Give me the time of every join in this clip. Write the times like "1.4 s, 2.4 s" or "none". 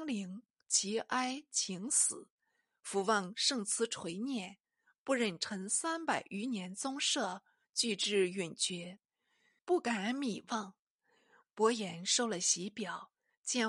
9.6 s